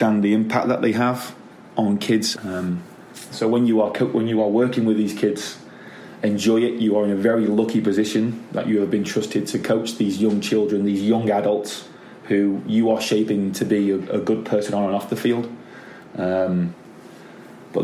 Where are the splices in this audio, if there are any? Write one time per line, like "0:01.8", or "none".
0:02.3

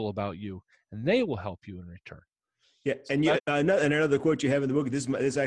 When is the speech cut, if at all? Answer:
0:03.4

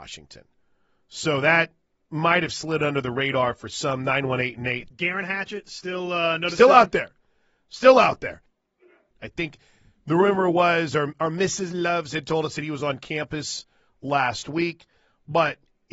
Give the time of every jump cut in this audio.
0:04.9
0:09.1

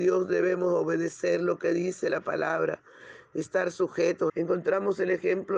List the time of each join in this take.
0:04.3

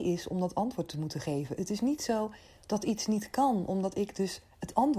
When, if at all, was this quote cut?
none

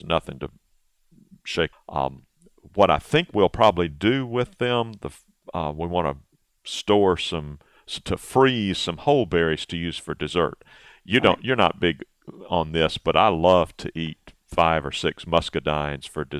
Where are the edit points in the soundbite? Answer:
0:01.7

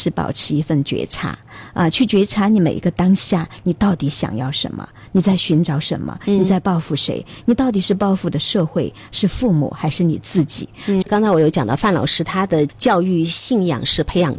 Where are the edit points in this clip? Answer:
0:11.0

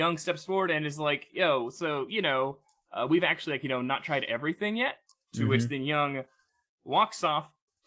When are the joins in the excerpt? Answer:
0:05.2

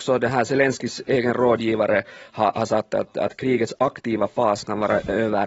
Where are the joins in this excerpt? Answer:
none

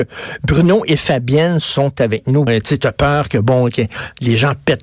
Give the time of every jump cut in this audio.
0:02.5

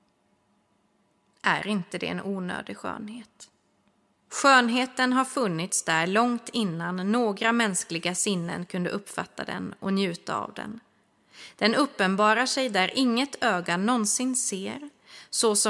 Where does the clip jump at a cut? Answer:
0:04.2

